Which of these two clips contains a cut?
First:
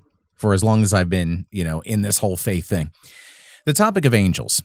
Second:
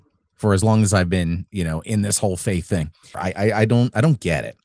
second; 1 cut; at 3.1 s

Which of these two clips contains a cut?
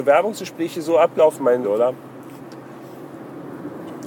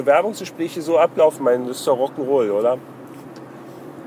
first; 1 cut; at 1.6 s

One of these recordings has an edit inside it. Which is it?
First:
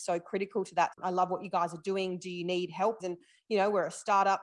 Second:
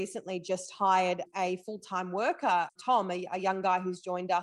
first; 2 cuts; at 0.9 s, 3.0 s

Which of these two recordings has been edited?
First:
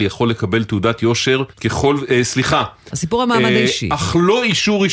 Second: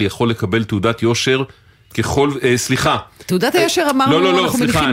first; 2 cuts; at 1.5 s, 2.9 s

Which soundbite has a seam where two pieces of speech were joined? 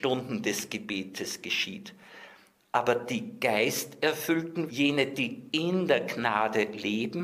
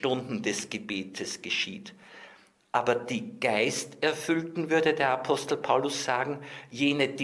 first; 1 cut; at 4.7 s

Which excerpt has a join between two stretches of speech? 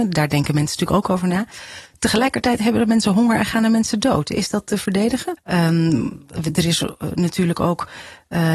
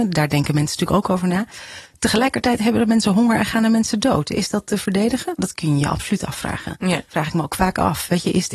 first; 1 cut; at 5.4 s

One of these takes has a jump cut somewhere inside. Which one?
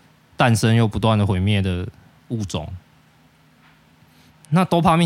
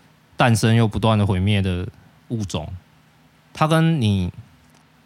second; 1 cut; at 3.3 s

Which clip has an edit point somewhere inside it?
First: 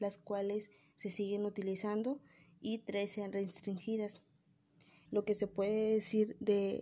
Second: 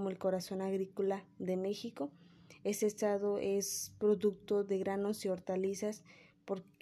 first; 1 cut; at 5.1 s

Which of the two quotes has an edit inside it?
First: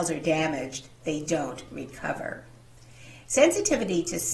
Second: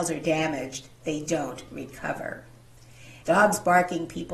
second; 1 cut; at 3.2 s

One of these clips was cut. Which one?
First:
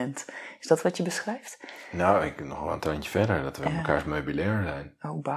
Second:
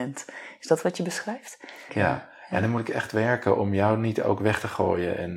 second; 1 cut; at 1.9 s

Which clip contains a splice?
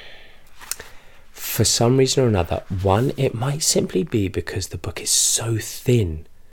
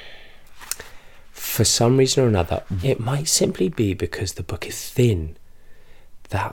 second; 2 cuts; at 2.8 s, 4.7 s

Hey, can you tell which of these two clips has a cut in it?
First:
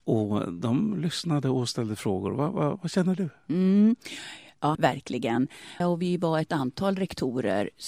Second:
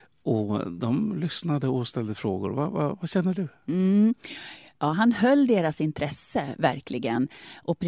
first; 2 cuts; at 4.8 s, 5.8 s

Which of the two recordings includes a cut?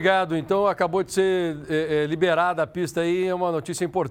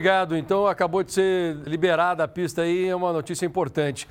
second; 1 cut; at 1.7 s

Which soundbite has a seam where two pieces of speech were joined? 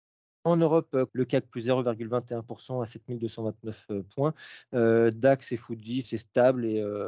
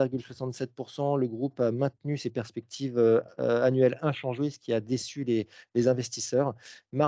first; 2 cuts; at 1.1 s, 6.0 s

